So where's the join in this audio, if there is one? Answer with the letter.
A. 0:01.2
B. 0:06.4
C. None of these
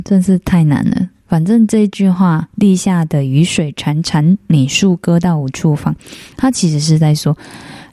C